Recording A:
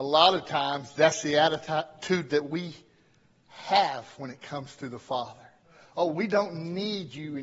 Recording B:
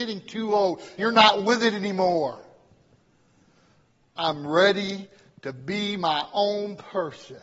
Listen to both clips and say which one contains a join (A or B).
B